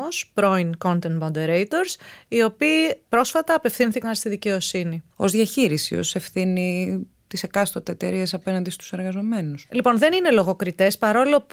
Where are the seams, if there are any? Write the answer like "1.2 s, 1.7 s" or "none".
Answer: 5.1 s, 9.6 s

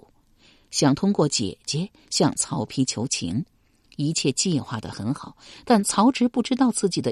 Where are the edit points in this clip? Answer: none

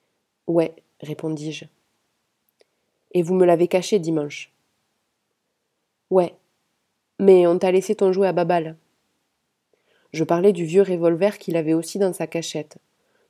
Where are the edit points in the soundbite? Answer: none

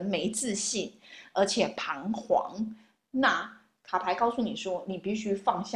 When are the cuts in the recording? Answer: none

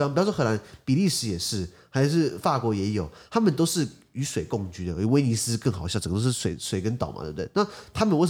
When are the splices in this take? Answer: none

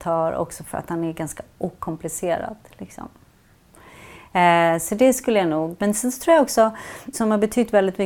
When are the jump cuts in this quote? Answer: 5.8 s, 7.1 s

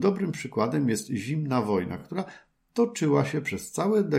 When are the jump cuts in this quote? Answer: none

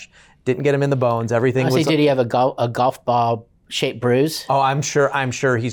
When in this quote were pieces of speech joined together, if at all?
none

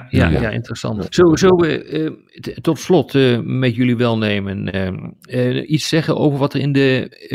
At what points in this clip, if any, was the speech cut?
1.1 s

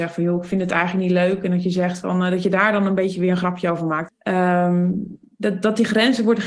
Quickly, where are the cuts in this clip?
4.1 s

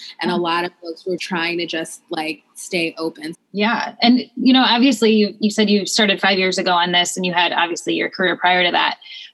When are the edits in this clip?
1.2 s, 3.3 s

